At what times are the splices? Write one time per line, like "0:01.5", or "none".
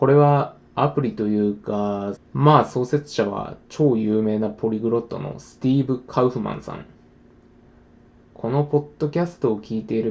0:02.2